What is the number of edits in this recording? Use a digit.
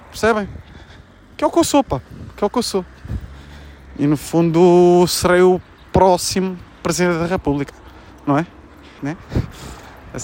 1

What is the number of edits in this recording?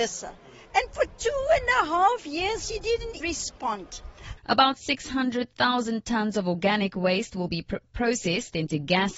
2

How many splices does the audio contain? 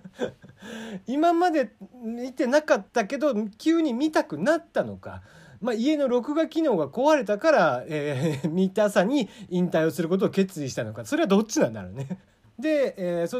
1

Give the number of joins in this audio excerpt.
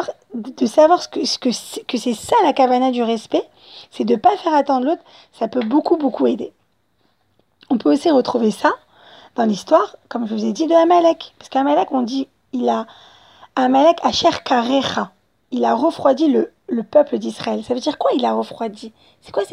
0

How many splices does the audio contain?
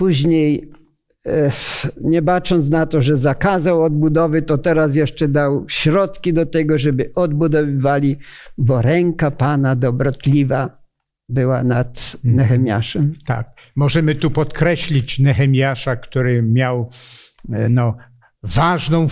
0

